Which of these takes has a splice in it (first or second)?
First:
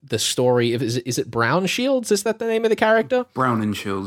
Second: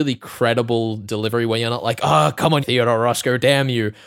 second